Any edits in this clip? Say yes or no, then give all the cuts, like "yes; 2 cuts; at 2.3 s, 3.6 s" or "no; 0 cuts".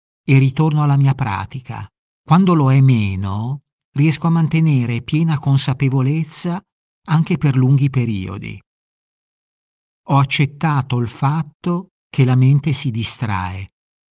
yes; 1 cut; at 2.1 s